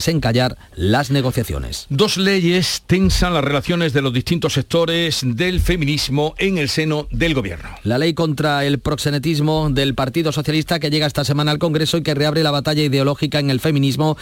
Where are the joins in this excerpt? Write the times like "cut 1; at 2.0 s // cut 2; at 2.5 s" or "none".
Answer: none

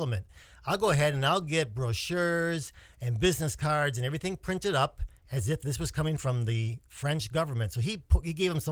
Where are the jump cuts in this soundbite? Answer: none

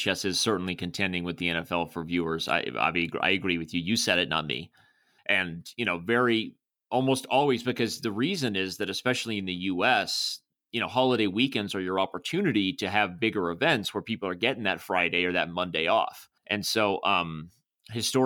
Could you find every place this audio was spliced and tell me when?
cut 1; at 5.2 s // cut 2; at 16.4 s

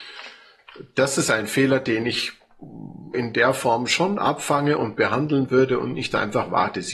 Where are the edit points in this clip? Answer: cut 1; at 3.1 s

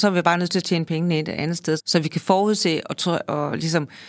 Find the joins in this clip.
cut 1; at 1.8 s

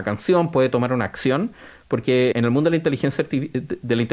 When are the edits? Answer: cut 1; at 2.3 s

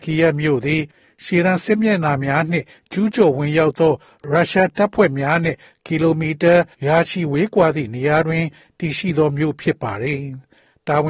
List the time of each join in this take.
cut 1; at 6.7 s

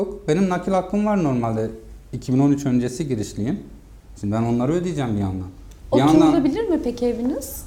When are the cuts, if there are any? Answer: cut 1; at 4.1 s

